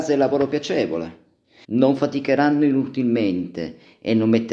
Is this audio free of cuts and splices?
no; 1 cut; at 1.6 s

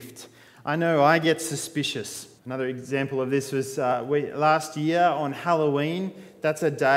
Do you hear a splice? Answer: yes; 1 cut; at 2.4 s

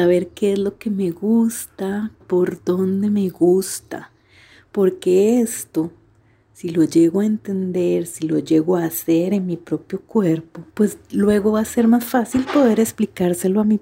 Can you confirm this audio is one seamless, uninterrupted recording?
no; 2 cuts; at 2.2 s, 10.7 s

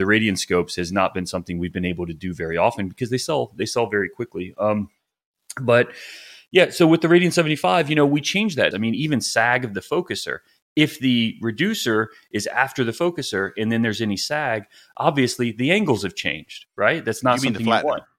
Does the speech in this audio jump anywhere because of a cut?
yes; 1 cut; at 8.7 s

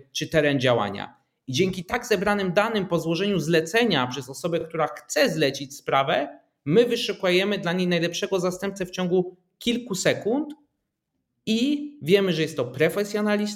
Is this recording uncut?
yes; 0 cuts

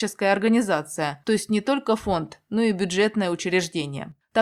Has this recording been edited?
no; 0 cuts

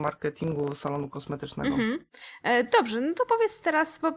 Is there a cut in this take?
no; 0 cuts

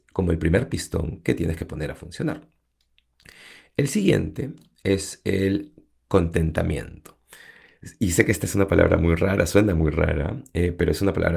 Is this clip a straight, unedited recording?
yes; 0 cuts

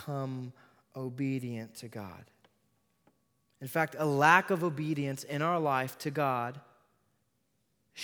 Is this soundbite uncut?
yes; 0 cuts

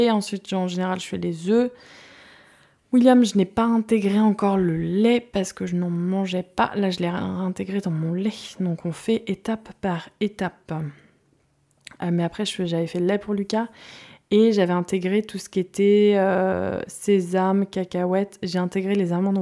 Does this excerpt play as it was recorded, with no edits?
yes; 0 cuts

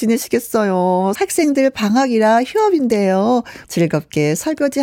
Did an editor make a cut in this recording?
yes; 2 cuts; at 1.2 s, 3.6 s

